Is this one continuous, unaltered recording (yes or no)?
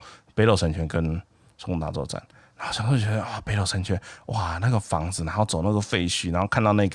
yes